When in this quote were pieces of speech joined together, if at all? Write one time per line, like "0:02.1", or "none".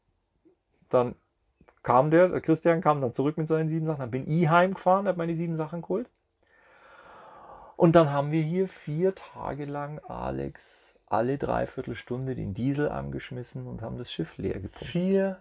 none